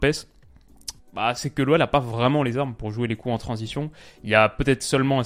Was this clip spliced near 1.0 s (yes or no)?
yes